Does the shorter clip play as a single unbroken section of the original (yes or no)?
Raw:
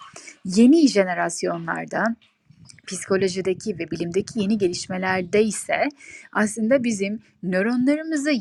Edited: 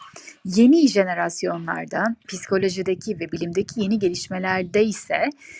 no